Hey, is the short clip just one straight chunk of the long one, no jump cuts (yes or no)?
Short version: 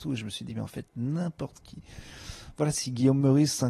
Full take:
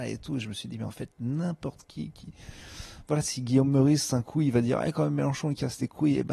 no